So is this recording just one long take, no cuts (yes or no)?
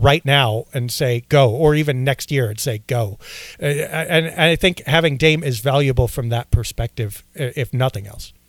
yes